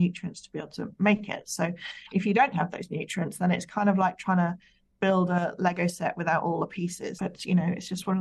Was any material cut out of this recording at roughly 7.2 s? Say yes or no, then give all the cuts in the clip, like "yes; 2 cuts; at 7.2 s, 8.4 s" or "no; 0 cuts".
yes; 1 cut; at 7.2 s